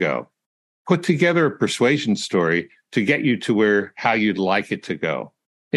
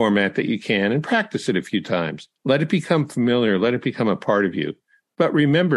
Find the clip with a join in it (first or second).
second